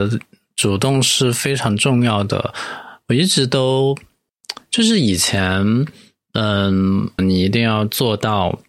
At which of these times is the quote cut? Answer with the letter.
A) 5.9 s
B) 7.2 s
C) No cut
B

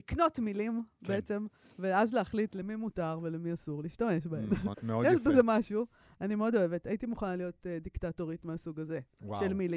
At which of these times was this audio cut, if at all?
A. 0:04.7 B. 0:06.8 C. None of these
A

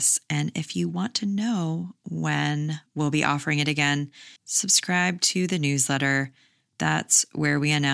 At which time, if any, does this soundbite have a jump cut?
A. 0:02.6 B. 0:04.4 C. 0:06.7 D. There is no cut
B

